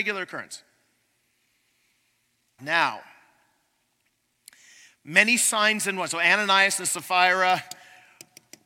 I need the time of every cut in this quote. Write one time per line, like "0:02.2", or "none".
0:02.6